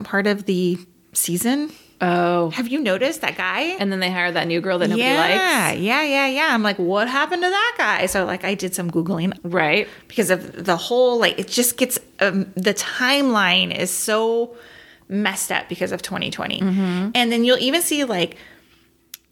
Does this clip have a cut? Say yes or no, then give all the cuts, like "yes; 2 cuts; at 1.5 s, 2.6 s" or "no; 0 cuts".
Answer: yes; 1 cut; at 9.4 s